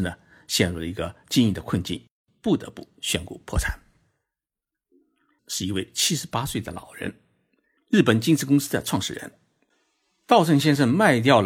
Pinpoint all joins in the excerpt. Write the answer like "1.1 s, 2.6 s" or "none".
5.4 s, 7.8 s